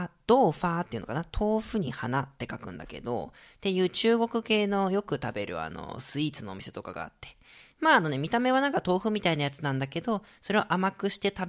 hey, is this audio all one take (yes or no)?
yes